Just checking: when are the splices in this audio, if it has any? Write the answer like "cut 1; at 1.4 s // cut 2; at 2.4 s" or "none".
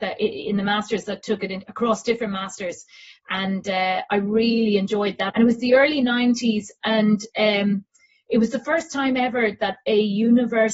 cut 1; at 5.3 s